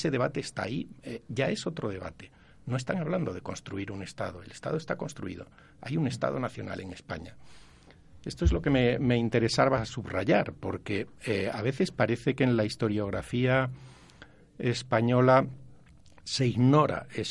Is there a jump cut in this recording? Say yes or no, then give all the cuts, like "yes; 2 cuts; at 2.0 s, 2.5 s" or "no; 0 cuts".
no; 0 cuts